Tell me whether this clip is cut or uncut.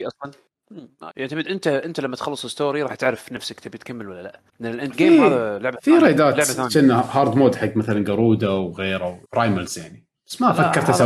cut